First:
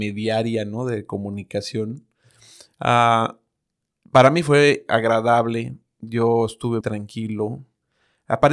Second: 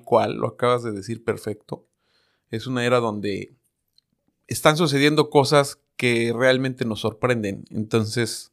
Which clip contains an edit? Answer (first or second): first